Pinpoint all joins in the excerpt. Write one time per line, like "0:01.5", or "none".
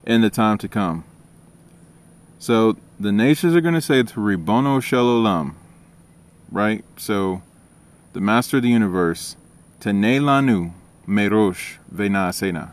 none